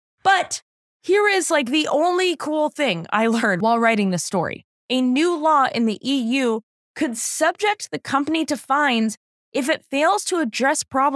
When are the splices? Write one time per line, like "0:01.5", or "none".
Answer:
none

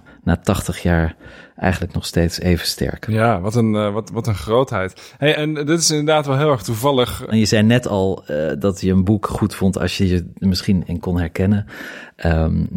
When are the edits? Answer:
0:05.3
0:07.3
0:08.6

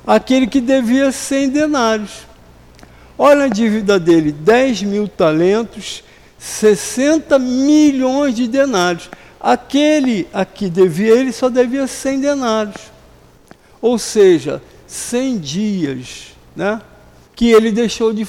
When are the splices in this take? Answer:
0:17.3

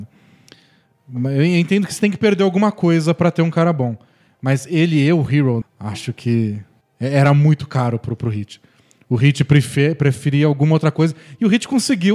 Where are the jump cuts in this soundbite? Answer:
0:05.6

